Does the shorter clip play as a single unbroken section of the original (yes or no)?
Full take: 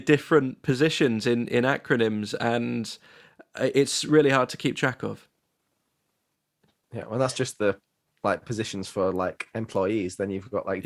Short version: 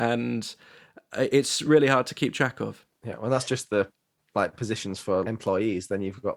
no